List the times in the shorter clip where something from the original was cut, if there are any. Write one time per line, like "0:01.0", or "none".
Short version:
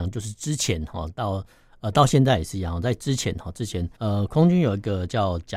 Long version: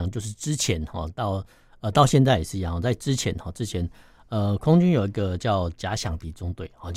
0:04.0